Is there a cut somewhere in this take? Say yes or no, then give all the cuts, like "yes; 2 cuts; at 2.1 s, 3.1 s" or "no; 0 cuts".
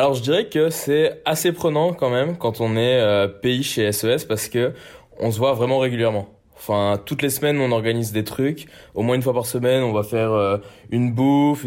no; 0 cuts